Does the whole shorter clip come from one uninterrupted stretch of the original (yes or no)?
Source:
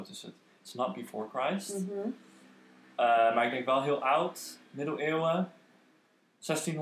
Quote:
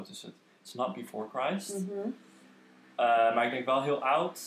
yes